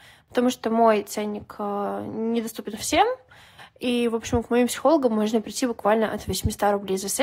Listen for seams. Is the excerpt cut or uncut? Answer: uncut